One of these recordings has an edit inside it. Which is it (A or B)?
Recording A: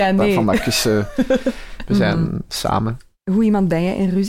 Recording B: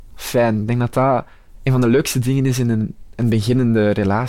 A